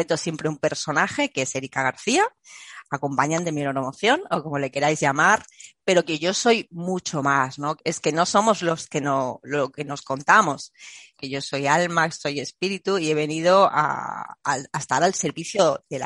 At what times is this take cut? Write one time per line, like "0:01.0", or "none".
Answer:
0:07.8
0:11.2